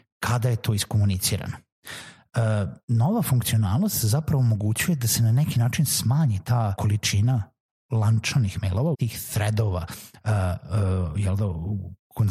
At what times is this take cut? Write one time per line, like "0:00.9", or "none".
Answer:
0:06.8
0:08.9